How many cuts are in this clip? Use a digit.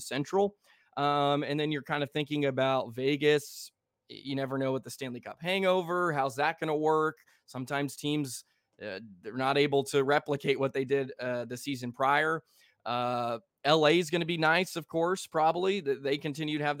0